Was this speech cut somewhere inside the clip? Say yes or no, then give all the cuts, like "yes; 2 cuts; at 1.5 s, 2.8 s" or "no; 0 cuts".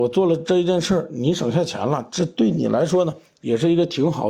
no; 0 cuts